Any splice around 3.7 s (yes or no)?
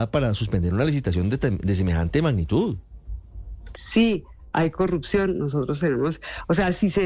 yes